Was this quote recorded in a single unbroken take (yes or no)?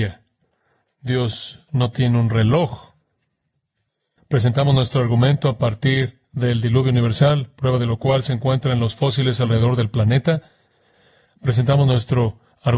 no